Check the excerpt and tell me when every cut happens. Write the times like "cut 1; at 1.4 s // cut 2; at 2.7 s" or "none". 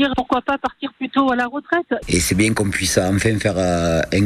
cut 1; at 2.0 s